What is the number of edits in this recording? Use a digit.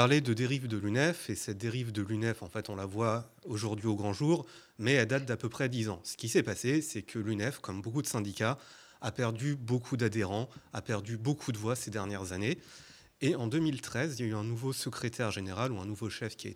0